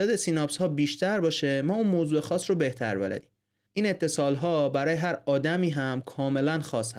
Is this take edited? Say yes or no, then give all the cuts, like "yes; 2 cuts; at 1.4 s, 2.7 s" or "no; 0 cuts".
yes; 1 cut; at 3.7 s